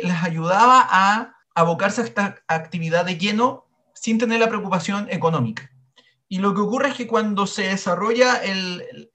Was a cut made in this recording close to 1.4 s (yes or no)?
yes